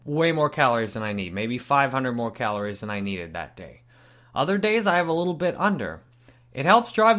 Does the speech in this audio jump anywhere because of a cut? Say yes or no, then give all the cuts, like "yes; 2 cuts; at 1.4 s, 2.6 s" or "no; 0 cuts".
no; 0 cuts